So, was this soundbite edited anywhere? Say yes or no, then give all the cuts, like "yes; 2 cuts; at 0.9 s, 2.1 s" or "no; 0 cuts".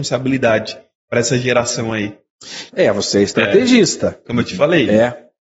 yes; 2 cuts; at 2.7 s, 4.3 s